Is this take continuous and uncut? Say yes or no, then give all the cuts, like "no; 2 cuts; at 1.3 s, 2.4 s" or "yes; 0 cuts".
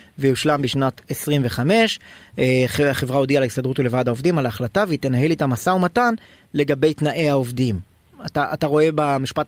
yes; 0 cuts